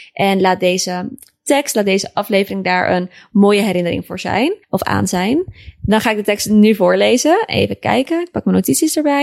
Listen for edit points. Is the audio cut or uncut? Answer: cut